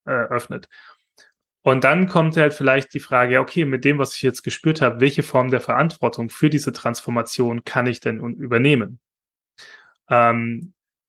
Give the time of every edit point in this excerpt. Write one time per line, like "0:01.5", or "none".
none